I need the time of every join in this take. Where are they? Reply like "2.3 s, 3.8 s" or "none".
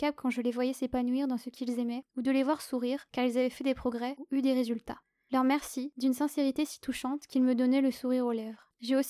none